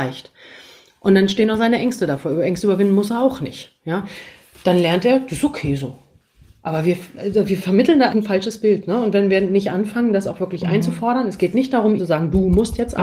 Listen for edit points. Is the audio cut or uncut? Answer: cut